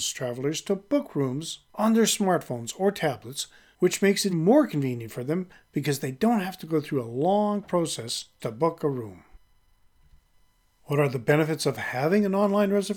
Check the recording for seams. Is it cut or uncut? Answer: cut